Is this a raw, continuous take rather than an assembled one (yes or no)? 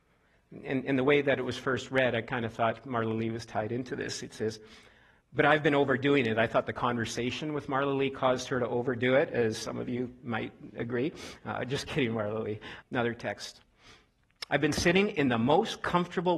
no